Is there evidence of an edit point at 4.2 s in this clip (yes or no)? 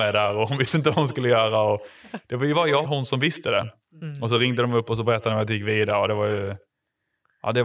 no